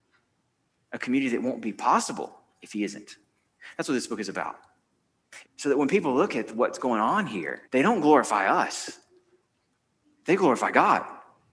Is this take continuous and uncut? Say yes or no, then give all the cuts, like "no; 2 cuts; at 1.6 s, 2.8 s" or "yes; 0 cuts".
no; 2 cuts; at 5.4 s, 7.6 s